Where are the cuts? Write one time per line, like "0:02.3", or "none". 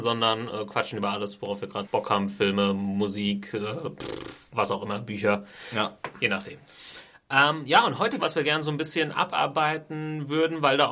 0:01.8
0:08.2